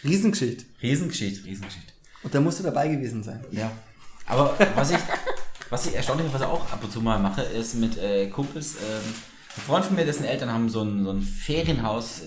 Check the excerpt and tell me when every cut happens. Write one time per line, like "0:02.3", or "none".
0:01.4